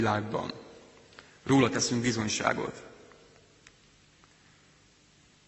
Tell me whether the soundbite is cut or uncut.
uncut